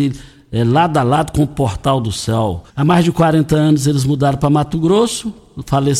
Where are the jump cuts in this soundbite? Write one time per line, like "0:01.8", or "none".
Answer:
0:02.7